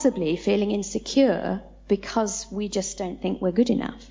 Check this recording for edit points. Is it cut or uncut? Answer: uncut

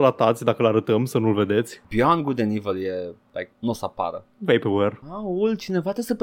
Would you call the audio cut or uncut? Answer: cut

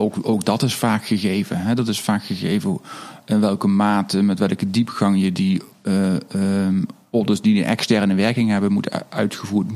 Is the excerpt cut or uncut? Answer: uncut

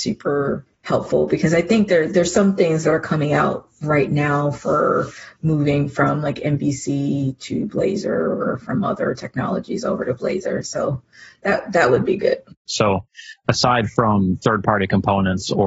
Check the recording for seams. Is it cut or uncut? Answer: cut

